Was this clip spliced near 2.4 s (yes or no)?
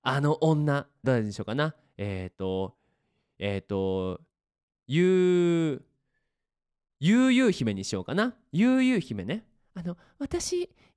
no